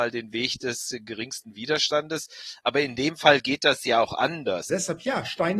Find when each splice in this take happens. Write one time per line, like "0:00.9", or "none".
0:04.7